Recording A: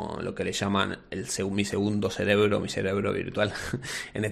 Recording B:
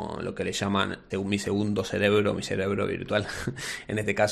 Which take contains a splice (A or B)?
B